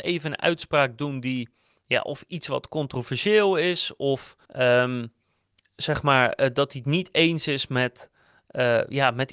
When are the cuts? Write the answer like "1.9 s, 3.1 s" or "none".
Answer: 4.5 s

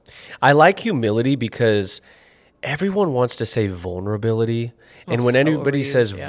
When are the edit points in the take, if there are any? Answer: none

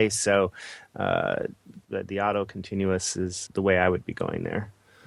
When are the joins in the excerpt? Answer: 1.8 s, 3.5 s

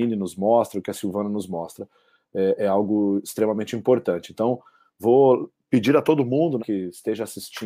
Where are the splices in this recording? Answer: 6.6 s

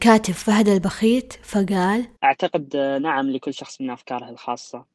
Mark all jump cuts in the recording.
2.2 s

